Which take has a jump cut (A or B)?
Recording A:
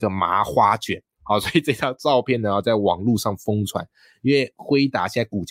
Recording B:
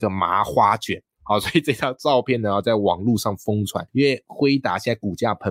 B